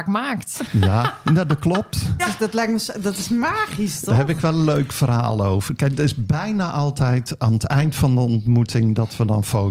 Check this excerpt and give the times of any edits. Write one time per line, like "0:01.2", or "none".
0:02.2